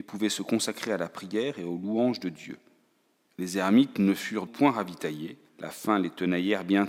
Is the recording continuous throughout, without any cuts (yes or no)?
no